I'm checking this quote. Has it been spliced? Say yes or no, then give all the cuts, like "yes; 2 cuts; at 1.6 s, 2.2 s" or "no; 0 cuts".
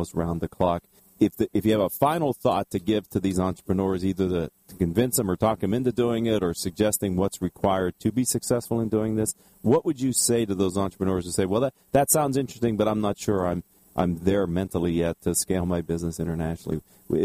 no; 0 cuts